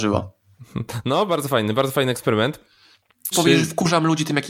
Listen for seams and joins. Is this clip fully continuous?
no; 1 cut; at 3.3 s

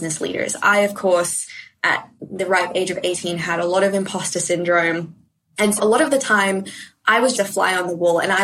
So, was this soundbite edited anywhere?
yes; 2 cuts; at 5.8 s, 7.3 s

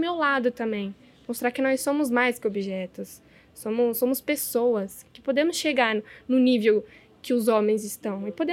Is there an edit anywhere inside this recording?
no; 0 cuts

